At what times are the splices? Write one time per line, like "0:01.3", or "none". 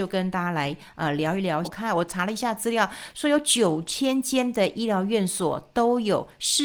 0:01.6